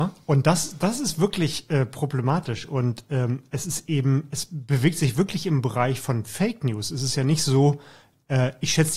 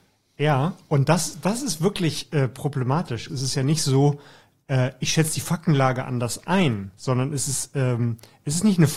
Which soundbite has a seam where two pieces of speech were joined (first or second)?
second